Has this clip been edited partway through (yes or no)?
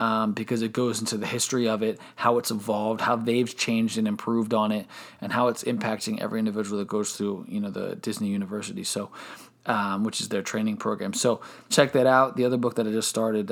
yes